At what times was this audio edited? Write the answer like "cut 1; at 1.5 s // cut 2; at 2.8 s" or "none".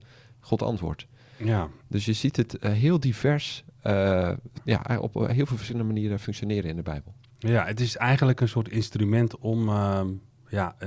none